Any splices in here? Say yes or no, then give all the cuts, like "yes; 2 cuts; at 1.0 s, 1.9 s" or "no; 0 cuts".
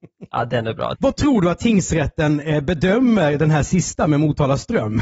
yes; 1 cut; at 0.9 s